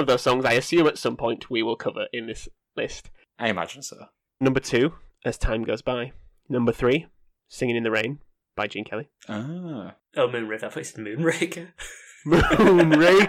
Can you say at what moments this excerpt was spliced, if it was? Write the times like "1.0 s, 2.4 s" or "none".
4.4 s, 9.2 s